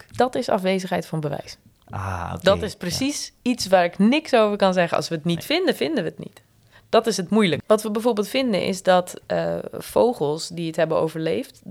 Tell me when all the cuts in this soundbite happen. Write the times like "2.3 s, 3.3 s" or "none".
7.6 s